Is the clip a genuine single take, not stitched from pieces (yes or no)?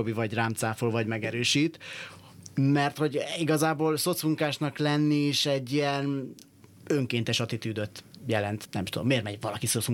yes